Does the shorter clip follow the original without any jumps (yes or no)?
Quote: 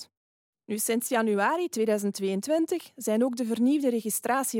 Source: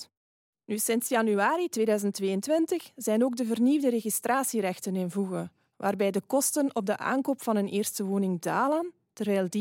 yes